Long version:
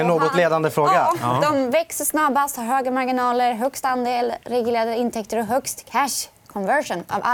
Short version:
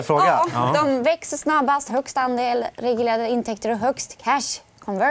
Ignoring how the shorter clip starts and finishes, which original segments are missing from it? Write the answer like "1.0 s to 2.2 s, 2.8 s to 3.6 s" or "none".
2.6 s to 3.6 s